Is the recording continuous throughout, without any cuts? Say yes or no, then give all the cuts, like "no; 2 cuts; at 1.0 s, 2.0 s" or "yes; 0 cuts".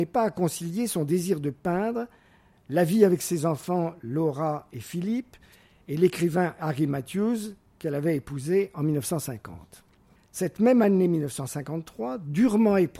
no; 1 cut; at 10.2 s